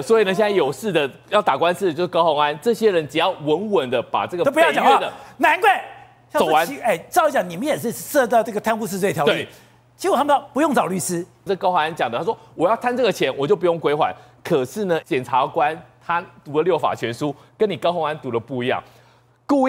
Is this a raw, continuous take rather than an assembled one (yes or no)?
no